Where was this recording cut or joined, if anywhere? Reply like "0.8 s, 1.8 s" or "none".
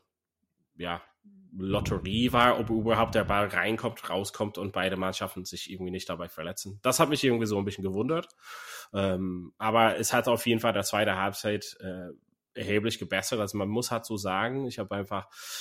none